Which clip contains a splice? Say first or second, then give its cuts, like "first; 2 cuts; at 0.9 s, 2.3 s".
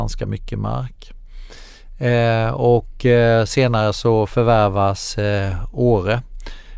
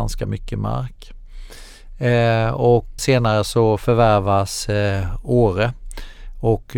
second; 1 cut; at 3.0 s